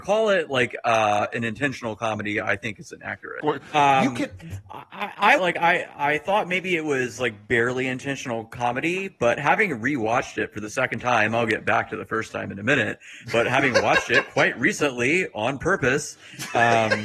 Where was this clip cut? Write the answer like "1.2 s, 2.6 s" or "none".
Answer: 3.4 s, 5.4 s

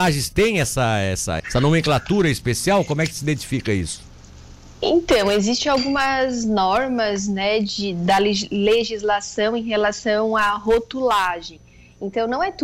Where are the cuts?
1.4 s

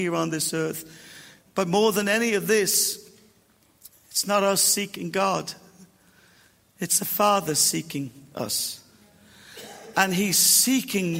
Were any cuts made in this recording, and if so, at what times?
none

